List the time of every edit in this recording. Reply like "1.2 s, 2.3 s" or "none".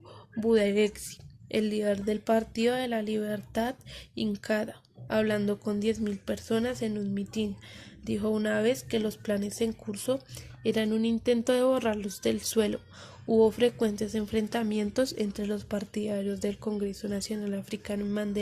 5.1 s

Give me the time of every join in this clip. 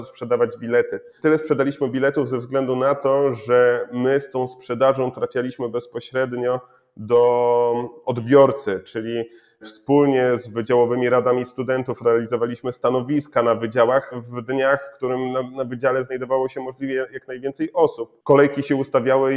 none

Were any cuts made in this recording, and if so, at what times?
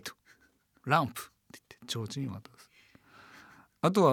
none

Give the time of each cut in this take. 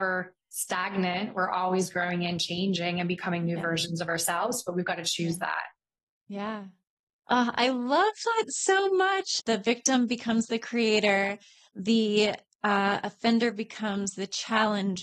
none

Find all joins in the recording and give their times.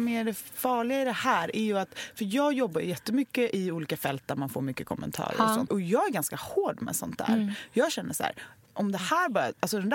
5.7 s

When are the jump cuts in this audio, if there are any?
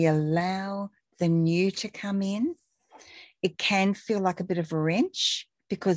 none

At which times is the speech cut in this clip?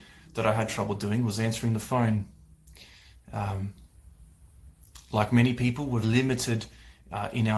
6.0 s

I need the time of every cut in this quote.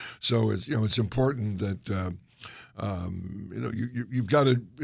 none

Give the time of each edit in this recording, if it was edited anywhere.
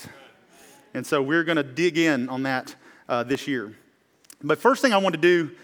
none

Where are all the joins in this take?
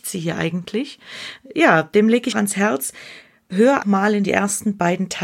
2.3 s, 3.8 s

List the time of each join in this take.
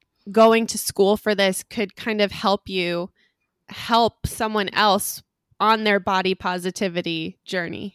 none

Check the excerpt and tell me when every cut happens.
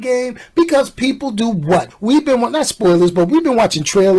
1.9 s

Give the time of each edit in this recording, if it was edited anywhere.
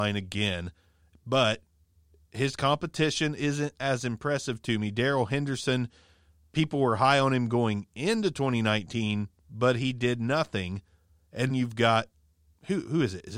11.5 s

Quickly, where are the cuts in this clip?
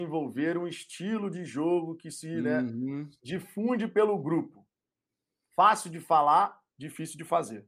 none

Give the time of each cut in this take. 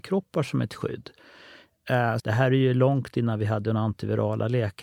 2.2 s

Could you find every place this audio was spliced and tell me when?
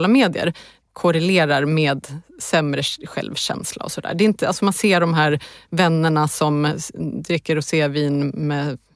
none

